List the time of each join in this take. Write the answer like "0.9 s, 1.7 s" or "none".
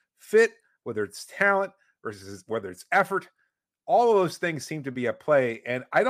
none